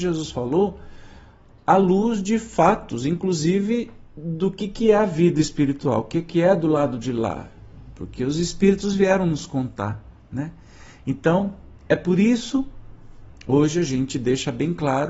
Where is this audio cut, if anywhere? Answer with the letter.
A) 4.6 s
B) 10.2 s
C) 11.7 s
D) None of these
D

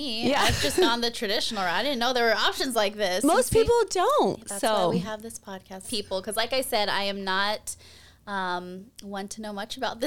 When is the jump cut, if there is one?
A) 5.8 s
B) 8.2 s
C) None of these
A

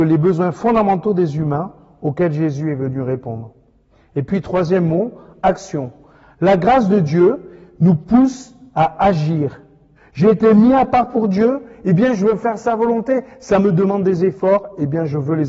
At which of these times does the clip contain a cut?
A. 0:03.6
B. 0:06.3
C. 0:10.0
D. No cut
C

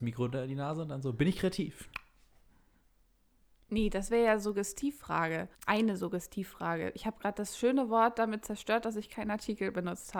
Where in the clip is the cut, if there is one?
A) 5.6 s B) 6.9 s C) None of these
A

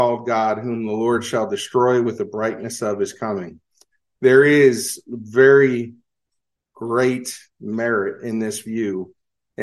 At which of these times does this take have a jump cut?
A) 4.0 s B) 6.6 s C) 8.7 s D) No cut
D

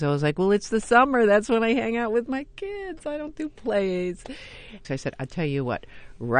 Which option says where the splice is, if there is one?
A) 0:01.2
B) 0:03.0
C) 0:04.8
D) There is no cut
C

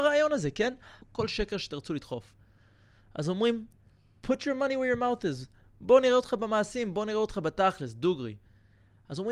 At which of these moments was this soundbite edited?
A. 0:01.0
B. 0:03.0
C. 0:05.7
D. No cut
A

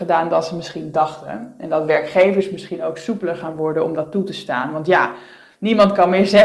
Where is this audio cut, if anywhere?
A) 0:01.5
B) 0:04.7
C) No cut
C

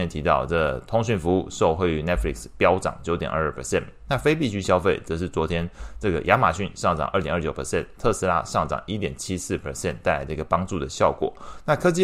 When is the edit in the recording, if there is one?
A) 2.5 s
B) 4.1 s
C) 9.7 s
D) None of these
D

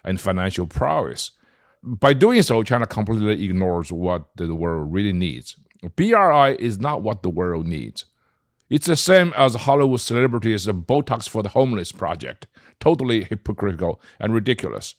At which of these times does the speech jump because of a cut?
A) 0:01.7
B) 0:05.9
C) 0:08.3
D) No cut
D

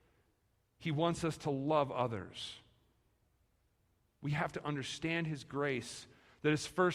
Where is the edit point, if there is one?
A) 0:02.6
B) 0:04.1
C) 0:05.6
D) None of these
D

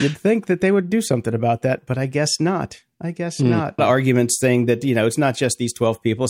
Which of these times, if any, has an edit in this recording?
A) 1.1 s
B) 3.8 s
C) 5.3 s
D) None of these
B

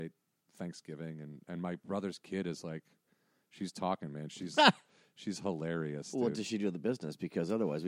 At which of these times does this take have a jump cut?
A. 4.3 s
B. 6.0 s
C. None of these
A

